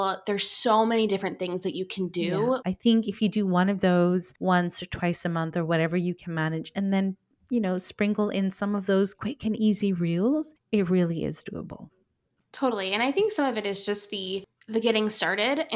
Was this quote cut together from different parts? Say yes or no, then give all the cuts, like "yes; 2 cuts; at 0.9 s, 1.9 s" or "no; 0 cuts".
yes; 1 cut; at 2.6 s